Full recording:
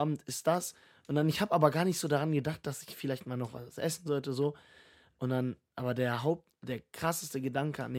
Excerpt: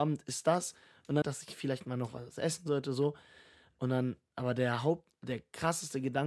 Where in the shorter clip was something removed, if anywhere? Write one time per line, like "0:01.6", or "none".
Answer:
0:01.2